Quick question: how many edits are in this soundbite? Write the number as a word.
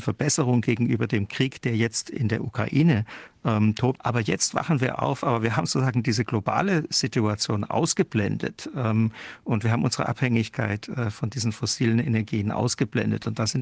one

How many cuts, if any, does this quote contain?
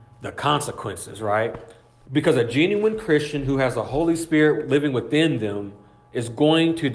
one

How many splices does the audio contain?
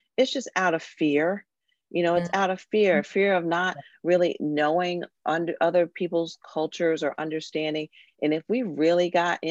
zero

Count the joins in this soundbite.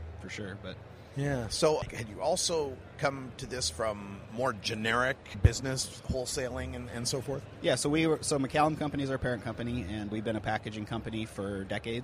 one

